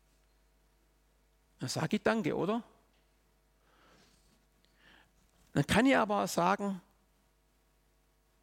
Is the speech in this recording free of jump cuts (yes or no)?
yes